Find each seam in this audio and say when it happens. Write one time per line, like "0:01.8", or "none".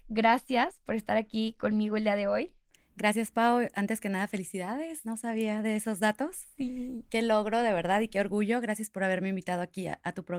none